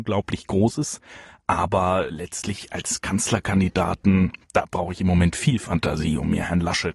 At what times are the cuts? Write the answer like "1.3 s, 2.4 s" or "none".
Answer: none